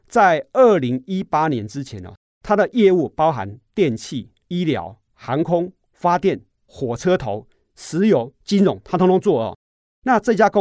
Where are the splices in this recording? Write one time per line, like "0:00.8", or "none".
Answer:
0:06.5